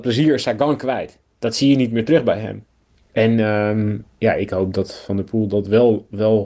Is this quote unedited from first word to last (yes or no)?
yes